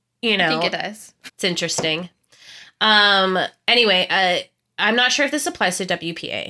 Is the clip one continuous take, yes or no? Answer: no